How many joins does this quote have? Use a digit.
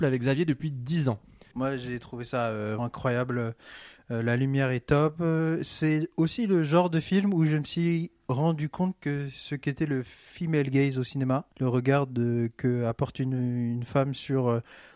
3